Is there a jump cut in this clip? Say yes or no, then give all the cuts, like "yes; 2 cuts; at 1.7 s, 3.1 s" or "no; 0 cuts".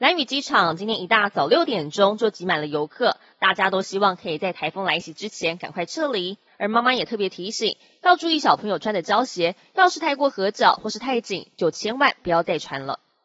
yes; 1 cut; at 6.5 s